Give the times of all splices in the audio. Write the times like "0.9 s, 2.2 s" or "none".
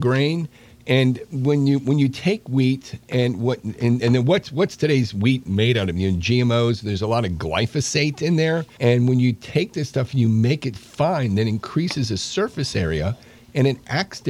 8.8 s, 10.8 s